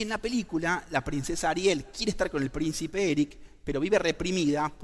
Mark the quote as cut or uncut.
uncut